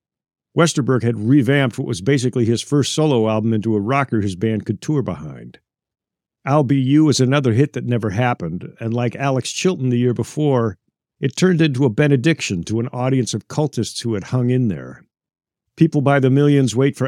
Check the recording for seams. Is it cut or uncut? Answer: uncut